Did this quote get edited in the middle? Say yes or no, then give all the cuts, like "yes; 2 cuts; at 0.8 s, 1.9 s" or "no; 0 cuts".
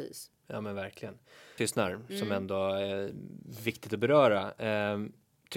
yes; 1 cut; at 1.6 s